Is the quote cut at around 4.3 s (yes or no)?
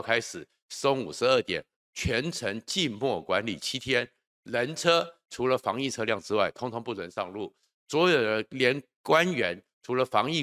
no